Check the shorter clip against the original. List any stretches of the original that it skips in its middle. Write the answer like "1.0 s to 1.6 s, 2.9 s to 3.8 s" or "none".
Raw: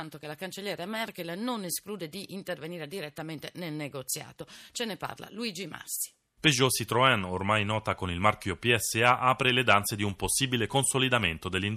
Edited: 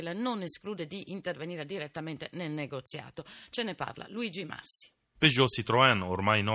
none